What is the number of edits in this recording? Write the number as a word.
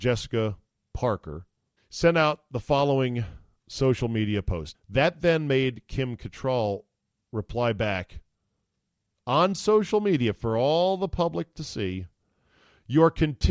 two